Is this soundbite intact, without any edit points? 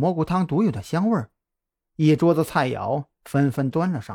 no; 1 cut; at 1.8 s

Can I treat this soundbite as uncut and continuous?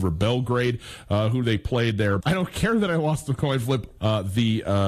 no; 2 cuts; at 2.2 s, 4.0 s

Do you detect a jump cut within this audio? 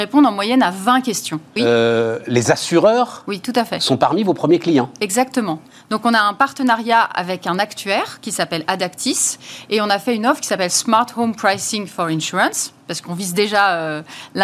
yes; 1 cut; at 1.6 s

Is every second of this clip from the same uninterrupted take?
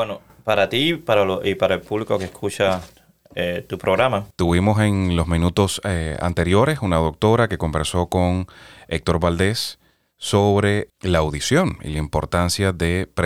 no; 1 cut; at 4.3 s

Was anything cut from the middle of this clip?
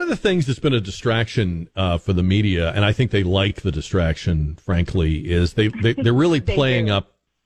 no; 0 cuts

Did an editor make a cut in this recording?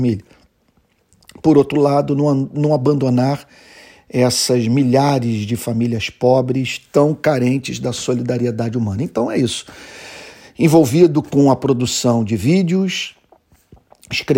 no; 0 cuts

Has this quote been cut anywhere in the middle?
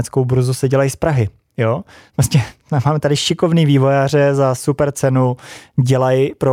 no; 0 cuts

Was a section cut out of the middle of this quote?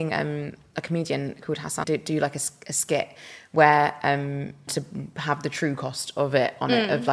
yes; 2 cuts; at 1.8 s, 4.7 s

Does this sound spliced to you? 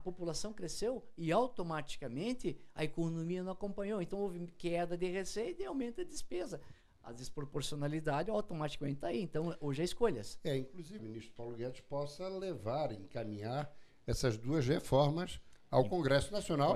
yes; 1 cut; at 11.0 s

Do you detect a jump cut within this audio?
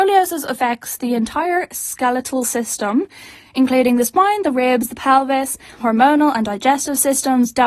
yes; 1 cut; at 5.8 s

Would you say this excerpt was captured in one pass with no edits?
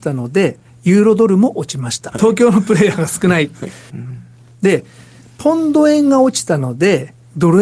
no; 2 cuts; at 2.1 s, 3.9 s

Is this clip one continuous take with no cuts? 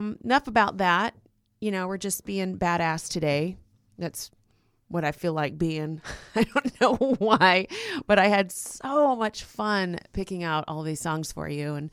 yes; 0 cuts

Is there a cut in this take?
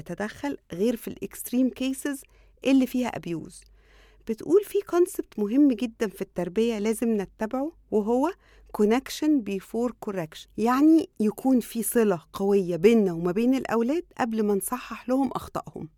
no; 0 cuts

